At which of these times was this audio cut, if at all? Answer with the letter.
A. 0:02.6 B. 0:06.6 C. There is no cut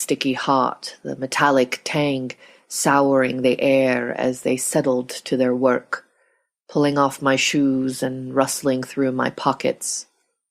C